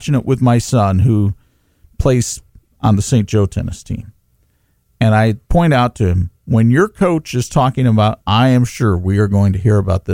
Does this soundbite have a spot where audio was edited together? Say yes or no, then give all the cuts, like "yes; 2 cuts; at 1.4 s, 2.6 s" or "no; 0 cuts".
yes; 2 cuts; at 5.4 s, 8.2 s